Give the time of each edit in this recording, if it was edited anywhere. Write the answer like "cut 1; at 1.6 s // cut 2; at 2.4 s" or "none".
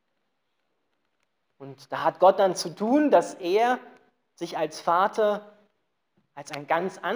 none